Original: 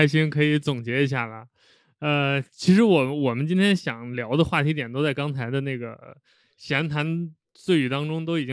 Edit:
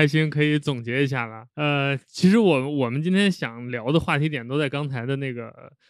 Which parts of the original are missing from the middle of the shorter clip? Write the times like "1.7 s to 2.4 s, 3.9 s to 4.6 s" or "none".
1.5 s to 1.9 s